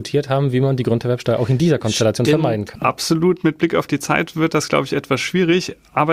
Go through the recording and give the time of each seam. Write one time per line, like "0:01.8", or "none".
0:02.7